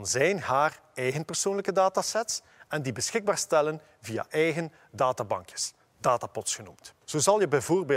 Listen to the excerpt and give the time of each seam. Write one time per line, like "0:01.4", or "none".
0:07.0